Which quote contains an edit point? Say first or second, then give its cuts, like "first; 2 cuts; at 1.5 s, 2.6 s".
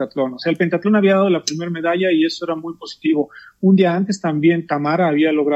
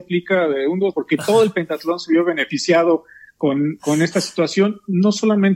second; 1 cut; at 0.9 s